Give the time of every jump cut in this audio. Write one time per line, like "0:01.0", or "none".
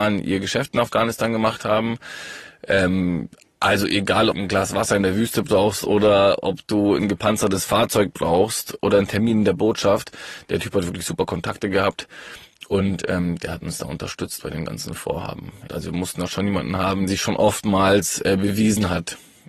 0:04.3
0:15.7
0:17.1